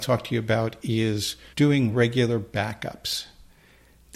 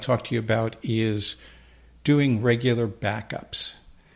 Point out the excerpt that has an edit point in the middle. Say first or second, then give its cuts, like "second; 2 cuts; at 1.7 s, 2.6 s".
first; 1 cut; at 1.5 s